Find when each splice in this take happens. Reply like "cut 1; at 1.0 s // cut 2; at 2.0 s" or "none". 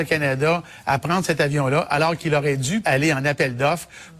cut 1; at 2.8 s